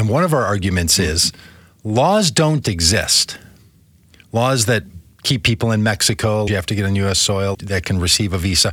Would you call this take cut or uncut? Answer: cut